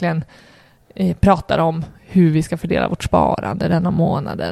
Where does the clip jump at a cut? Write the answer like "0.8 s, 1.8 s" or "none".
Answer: none